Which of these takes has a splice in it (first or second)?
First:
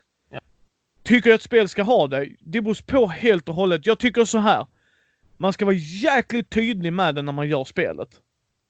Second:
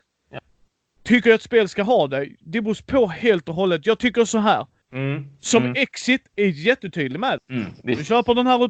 second